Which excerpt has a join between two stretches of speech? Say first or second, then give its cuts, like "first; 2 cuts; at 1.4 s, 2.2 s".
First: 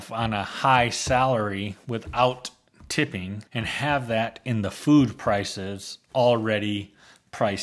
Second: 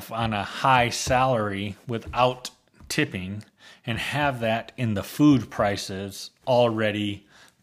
first; 1 cut; at 3.5 s